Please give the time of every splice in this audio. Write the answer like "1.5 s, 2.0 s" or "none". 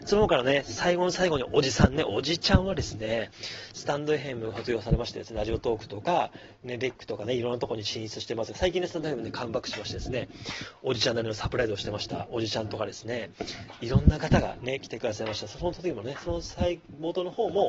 none